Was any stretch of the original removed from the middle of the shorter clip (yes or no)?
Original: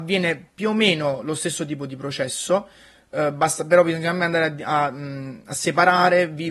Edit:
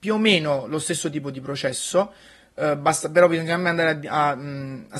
no